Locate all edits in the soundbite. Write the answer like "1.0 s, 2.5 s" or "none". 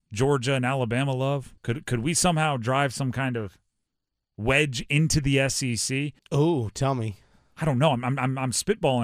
1.6 s, 6.2 s